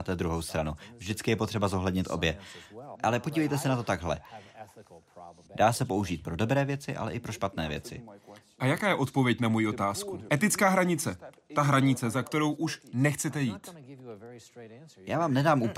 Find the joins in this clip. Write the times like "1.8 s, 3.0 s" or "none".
3.0 s, 5.5 s, 10.3 s

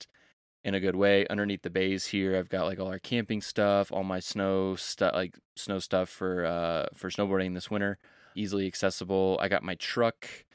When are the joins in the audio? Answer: 8.3 s

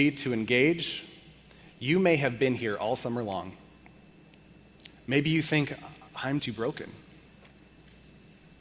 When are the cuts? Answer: 4.9 s, 6.4 s

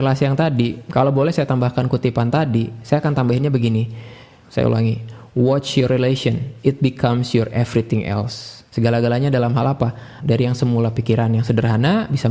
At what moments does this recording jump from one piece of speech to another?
4.4 s, 8.7 s, 10.2 s

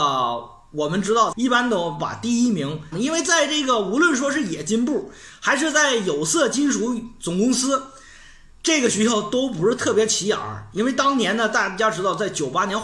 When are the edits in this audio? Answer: 1.3 s, 2.9 s

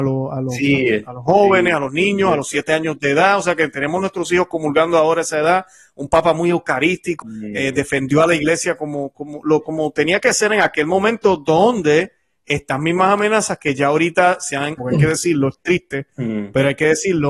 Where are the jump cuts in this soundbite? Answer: 7.2 s, 14.8 s

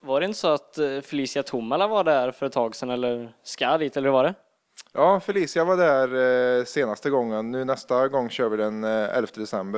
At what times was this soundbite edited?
none

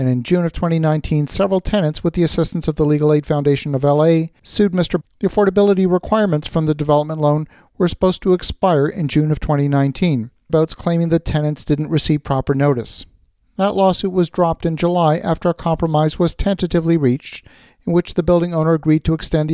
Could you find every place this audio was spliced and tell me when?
5.0 s, 10.5 s

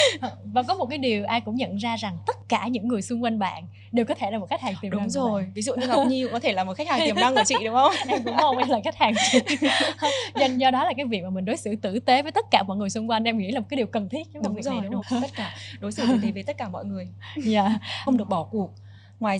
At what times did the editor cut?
15.0 s, 18.1 s

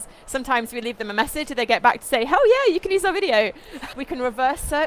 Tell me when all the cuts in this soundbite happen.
1.5 s, 3.9 s

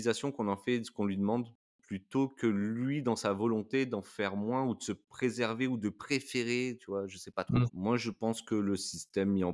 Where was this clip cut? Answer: 7.7 s

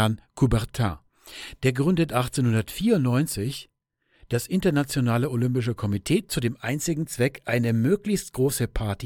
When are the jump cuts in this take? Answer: none

